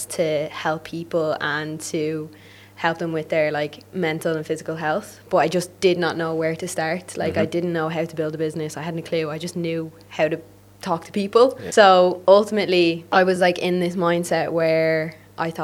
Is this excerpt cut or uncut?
uncut